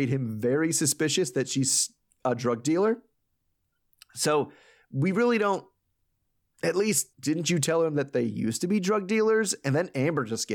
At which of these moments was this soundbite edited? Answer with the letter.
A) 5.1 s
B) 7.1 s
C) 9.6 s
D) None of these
B